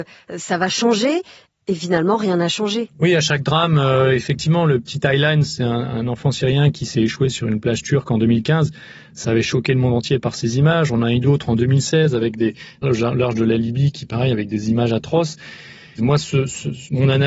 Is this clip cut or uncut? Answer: cut